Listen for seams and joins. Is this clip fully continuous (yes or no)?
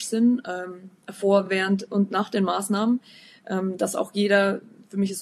yes